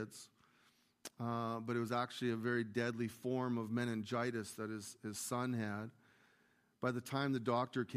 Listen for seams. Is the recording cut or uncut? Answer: uncut